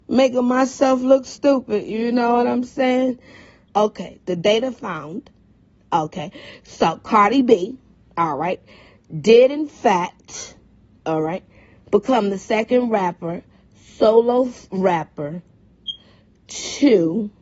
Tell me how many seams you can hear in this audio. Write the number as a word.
one